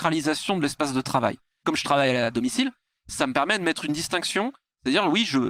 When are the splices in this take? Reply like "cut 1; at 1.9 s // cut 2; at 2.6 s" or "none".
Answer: none